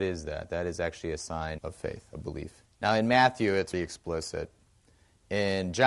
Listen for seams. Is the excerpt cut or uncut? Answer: cut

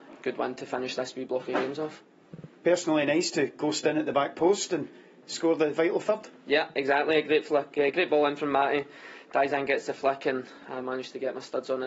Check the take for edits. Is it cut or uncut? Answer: uncut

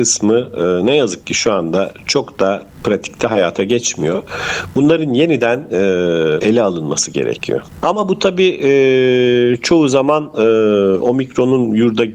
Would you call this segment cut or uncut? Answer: cut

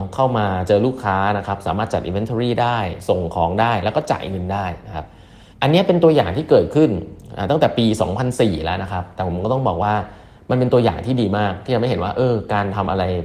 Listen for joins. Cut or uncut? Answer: cut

